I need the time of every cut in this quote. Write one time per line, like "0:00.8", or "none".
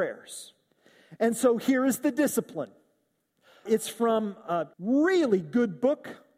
0:03.7
0:04.7